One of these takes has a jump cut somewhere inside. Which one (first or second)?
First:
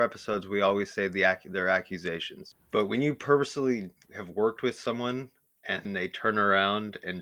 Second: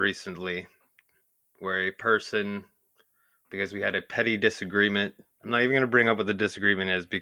first